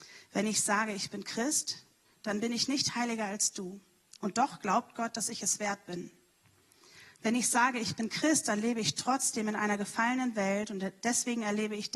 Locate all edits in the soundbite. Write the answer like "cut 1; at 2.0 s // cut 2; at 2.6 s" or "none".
cut 1; at 4.2 s